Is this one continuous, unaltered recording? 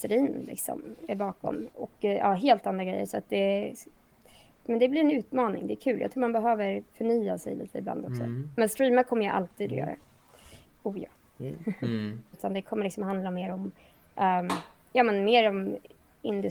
no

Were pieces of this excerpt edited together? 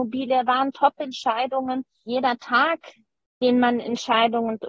yes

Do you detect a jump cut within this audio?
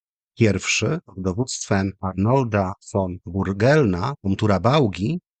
no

